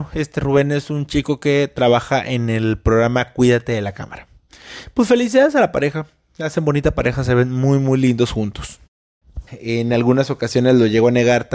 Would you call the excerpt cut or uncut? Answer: cut